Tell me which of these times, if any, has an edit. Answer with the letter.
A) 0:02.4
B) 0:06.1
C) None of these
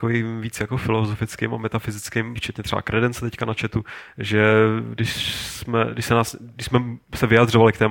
A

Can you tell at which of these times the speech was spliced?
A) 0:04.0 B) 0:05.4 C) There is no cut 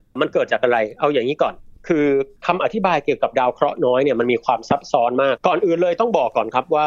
B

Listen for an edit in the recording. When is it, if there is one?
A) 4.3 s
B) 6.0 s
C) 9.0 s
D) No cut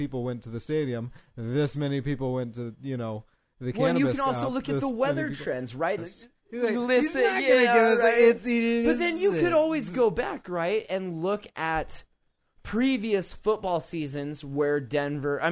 B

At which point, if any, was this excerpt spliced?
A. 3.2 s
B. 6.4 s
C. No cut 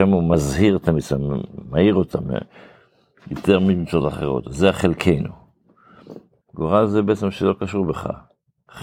B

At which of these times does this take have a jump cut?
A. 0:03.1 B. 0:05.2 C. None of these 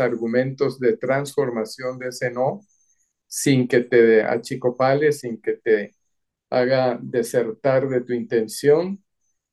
B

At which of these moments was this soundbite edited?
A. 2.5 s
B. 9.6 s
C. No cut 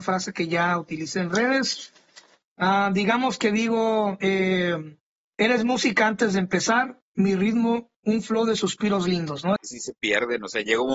B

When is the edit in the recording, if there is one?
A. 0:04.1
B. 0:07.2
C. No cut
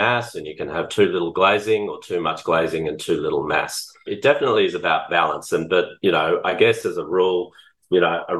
A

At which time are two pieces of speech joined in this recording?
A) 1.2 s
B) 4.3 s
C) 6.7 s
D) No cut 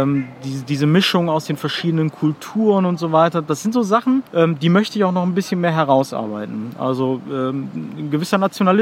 B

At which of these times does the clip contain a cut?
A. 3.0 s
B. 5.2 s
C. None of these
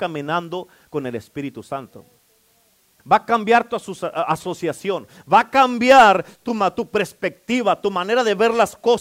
A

